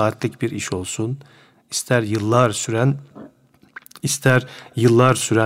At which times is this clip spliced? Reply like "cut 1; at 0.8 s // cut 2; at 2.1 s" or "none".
none

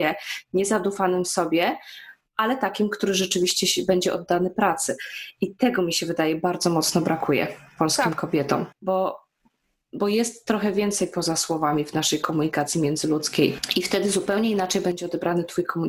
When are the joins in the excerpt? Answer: cut 1; at 8.7 s

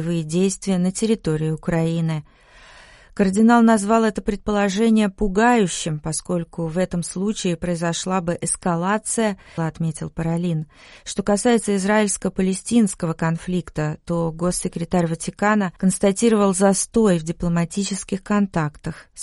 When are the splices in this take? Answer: cut 1; at 9.6 s // cut 2; at 11.0 s // cut 3; at 15.8 s

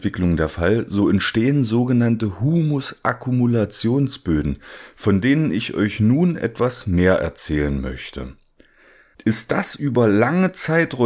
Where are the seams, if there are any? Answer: cut 1; at 9.1 s

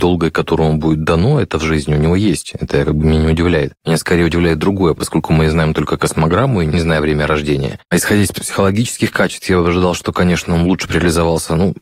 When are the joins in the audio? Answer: cut 1; at 8.3 s

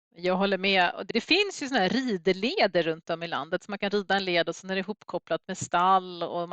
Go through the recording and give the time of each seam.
cut 1; at 1.1 s

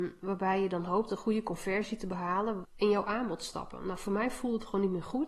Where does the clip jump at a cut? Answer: cut 1; at 2.6 s

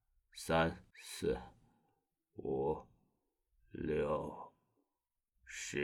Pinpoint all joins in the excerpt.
cut 1; at 0.9 s

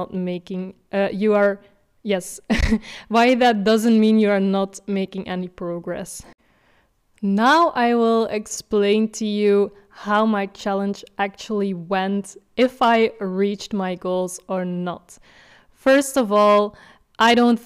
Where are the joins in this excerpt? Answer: none

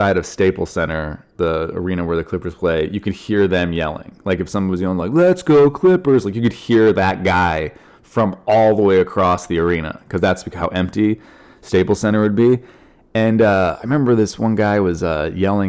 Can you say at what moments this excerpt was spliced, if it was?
none

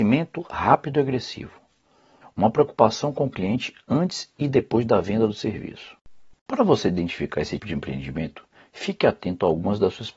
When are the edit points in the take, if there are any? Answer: cut 1; at 2.2 s // cut 2; at 6.3 s // cut 3; at 7.6 s

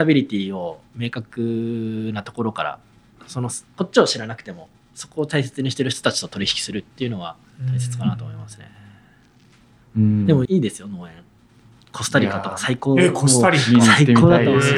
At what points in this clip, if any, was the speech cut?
cut 1; at 10.5 s

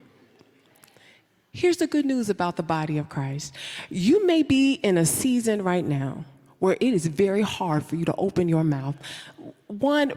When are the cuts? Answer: none

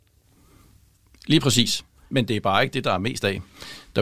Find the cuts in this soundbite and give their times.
cut 1; at 2.1 s

